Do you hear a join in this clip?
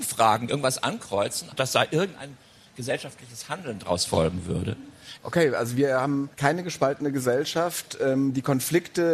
yes; 3 cuts; at 1.5 s, 5.2 s, 6.3 s

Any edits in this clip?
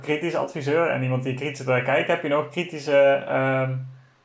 no; 0 cuts

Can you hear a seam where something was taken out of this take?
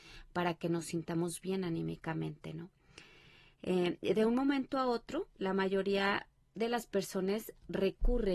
no; 0 cuts

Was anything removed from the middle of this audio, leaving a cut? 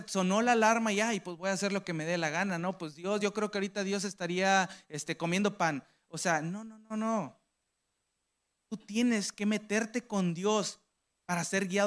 no; 0 cuts

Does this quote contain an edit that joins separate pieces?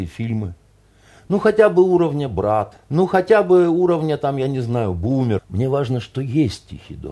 yes; 2 cuts; at 2.8 s, 5.4 s

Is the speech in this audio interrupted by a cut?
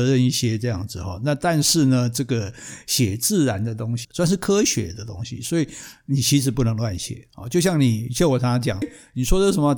yes; 2 cuts; at 4.0 s, 8.8 s

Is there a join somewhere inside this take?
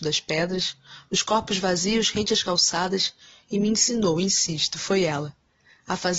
no; 0 cuts

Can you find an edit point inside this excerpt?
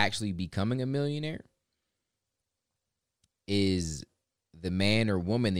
no; 0 cuts

